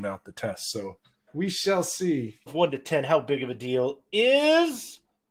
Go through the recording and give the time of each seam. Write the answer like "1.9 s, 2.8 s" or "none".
1.3 s, 2.5 s